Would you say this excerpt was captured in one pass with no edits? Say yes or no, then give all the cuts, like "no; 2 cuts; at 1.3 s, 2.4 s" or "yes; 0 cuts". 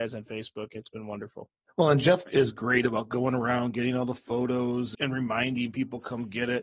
no; 1 cut; at 4.9 s